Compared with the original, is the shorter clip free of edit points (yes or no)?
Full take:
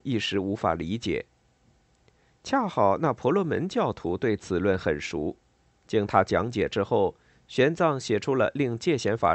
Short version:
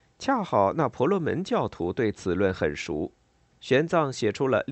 no